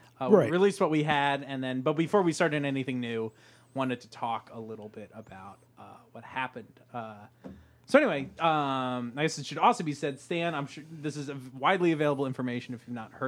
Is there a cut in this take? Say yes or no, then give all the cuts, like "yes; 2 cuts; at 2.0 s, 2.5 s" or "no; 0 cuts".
no; 0 cuts